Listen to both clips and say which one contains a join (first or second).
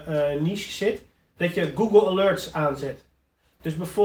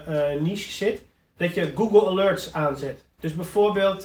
second